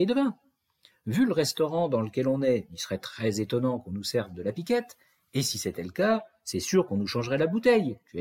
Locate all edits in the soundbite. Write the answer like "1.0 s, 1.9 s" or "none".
none